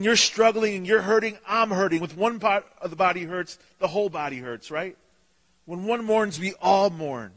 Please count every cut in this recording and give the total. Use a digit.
0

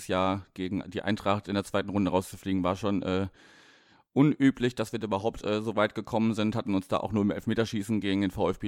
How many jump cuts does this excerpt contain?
0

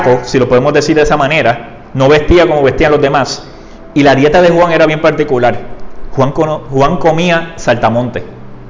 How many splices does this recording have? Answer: 0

